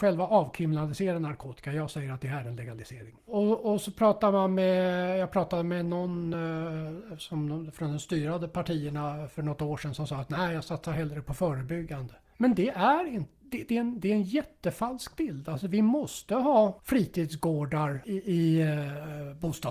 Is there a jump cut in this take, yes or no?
no